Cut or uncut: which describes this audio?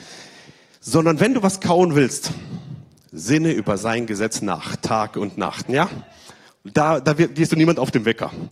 cut